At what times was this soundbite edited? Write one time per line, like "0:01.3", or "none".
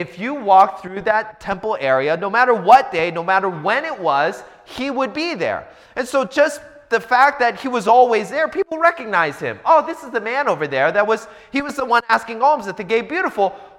none